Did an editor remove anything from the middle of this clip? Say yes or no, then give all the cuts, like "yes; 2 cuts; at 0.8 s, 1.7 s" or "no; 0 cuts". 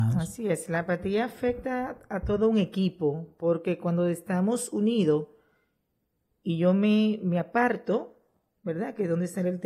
no; 0 cuts